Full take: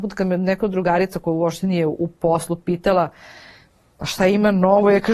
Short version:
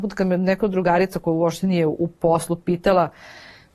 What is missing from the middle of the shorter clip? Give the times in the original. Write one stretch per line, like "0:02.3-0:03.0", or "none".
none